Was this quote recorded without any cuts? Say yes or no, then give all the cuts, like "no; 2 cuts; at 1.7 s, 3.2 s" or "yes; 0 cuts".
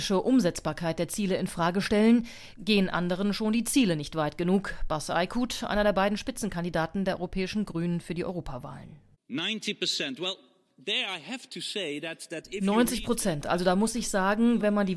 yes; 0 cuts